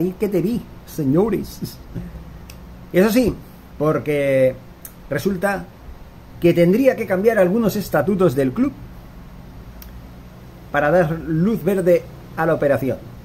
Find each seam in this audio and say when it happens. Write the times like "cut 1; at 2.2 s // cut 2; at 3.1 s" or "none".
cut 1; at 3.7 s